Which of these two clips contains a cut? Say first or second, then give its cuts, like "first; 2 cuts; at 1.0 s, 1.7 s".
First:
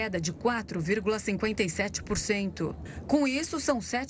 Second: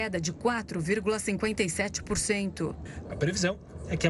second; 1 cut; at 3.0 s